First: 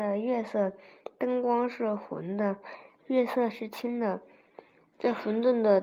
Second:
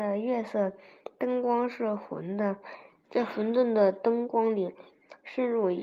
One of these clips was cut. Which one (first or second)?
second